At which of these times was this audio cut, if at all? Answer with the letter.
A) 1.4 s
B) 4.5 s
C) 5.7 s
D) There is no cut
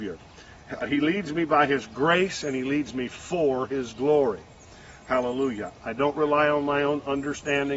C